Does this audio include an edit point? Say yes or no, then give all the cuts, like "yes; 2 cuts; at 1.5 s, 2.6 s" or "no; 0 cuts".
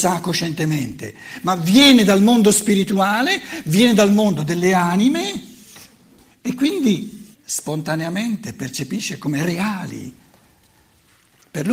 yes; 2 cuts; at 7.3 s, 9.2 s